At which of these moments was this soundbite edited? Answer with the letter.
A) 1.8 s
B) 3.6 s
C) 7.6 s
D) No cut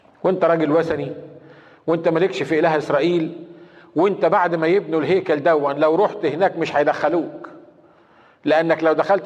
D